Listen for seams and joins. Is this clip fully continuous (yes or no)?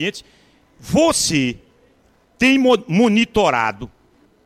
yes